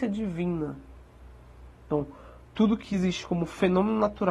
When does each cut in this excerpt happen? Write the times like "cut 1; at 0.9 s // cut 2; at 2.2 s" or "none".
none

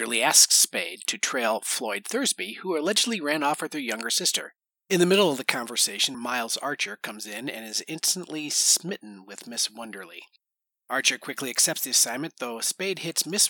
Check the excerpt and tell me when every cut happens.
cut 1; at 6.1 s

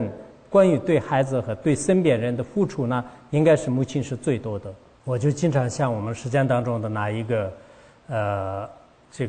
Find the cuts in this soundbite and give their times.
none

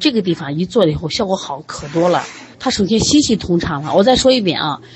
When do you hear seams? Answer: cut 1; at 2.5 s

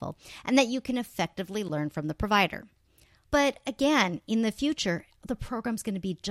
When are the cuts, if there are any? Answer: cut 1; at 3.2 s

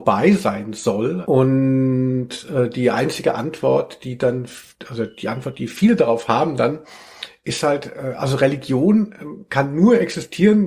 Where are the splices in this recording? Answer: cut 1; at 1.2 s

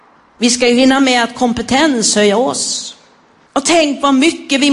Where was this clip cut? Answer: cut 1; at 3.5 s

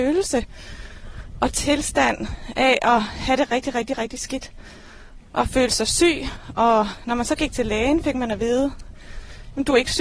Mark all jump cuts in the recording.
none

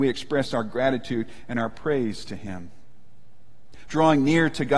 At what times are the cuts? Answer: cut 1; at 3.9 s

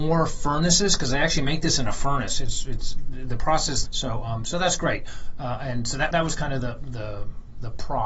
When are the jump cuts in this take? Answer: cut 1; at 3.8 s // cut 2; at 6.1 s

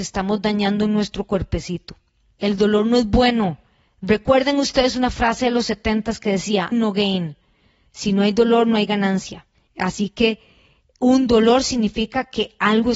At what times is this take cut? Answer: cut 1; at 2.3 s // cut 2; at 6.7 s // cut 3; at 9.7 s

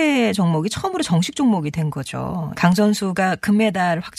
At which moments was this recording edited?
cut 1; at 2.5 s

